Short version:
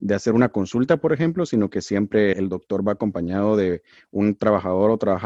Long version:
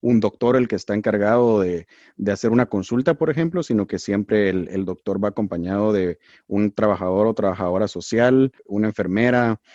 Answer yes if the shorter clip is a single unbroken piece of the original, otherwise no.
no